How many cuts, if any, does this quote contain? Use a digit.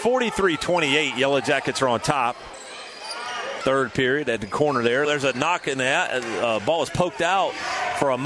2